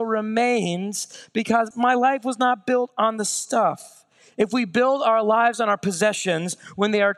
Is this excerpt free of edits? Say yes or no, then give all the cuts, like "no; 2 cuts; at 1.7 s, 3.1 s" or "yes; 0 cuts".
no; 1 cut; at 1.7 s